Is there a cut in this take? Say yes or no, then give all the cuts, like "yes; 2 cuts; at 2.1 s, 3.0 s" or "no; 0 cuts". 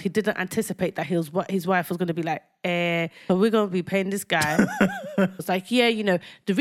yes; 2 cuts; at 3.3 s, 5.4 s